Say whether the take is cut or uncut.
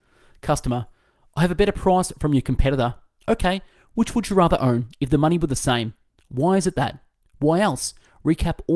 uncut